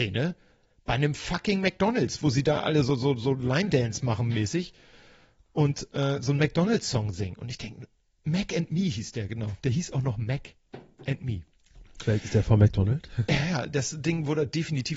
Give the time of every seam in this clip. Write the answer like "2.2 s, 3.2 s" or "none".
none